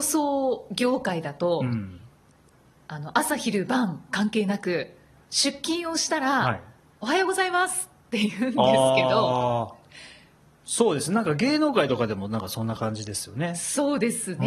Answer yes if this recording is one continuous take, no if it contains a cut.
yes